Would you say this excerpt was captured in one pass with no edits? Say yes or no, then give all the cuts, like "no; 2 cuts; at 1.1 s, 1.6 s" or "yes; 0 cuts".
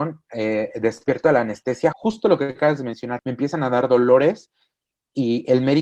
no; 2 cuts; at 1.9 s, 3.2 s